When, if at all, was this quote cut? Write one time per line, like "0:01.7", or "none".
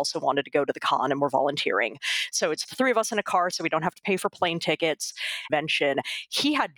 0:05.5